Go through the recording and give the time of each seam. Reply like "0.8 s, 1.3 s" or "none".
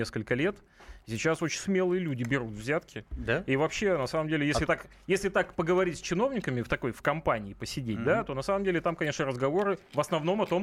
none